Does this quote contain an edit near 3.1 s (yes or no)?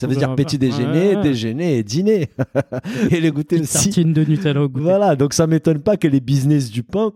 yes